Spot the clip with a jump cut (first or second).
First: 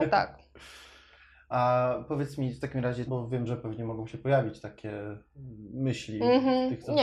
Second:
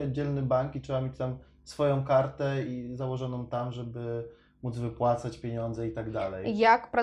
first